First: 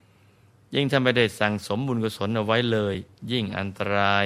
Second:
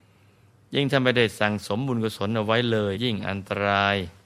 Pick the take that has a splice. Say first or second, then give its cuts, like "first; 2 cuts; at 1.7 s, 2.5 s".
second; 1 cut; at 2.9 s